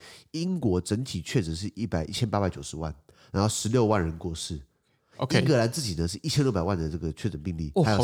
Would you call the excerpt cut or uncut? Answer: uncut